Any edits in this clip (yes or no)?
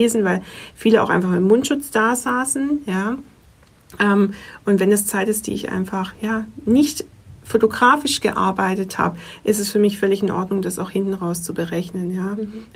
no